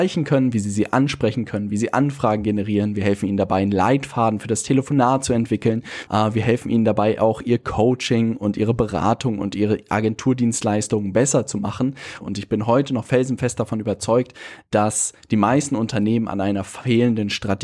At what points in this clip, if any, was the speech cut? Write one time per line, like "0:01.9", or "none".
0:06.1
0:12.2